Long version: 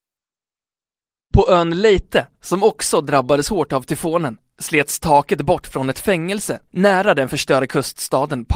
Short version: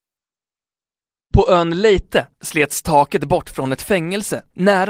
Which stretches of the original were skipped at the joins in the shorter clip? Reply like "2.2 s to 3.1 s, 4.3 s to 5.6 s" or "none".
2.3 s to 4.5 s